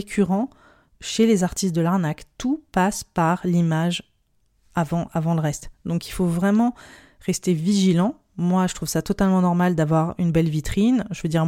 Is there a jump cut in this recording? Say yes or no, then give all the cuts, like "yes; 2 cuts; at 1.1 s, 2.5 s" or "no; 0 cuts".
no; 0 cuts